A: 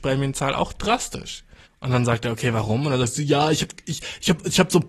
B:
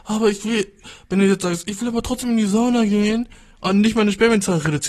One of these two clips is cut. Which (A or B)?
A